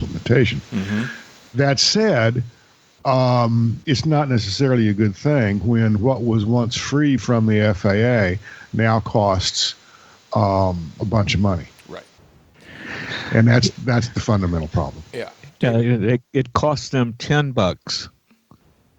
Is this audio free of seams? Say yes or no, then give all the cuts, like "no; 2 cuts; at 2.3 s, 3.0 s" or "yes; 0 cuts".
no; 2 cuts; at 3.8 s, 7.2 s